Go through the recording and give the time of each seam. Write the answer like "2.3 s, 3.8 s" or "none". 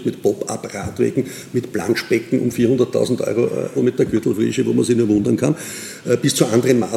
3.8 s